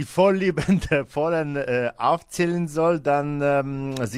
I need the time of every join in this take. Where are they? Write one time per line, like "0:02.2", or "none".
none